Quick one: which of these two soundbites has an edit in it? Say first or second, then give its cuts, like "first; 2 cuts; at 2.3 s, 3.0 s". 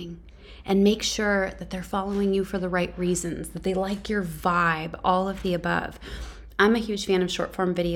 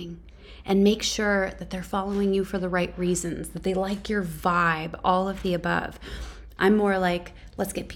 second; 1 cut; at 6.6 s